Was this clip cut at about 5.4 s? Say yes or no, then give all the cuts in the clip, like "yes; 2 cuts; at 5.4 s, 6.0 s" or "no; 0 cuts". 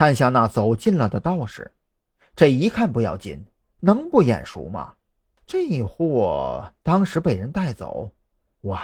yes; 2 cuts; at 3.8 s, 5.4 s